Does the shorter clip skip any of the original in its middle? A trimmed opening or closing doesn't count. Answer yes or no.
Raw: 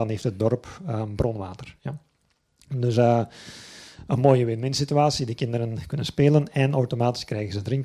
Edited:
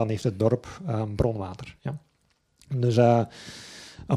no